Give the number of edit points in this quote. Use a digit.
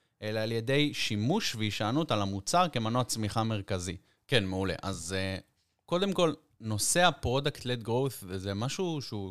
1